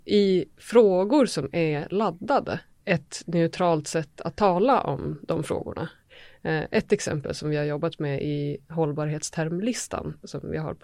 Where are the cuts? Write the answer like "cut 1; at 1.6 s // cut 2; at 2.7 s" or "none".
cut 1; at 2.7 s